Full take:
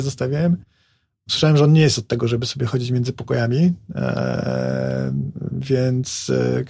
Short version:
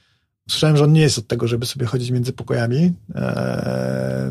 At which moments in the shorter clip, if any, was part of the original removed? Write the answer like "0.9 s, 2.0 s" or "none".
none